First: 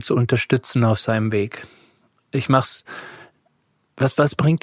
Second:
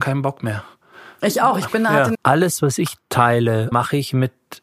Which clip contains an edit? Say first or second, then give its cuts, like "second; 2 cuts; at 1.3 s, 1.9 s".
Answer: second; 2 cuts; at 2.1 s, 3.7 s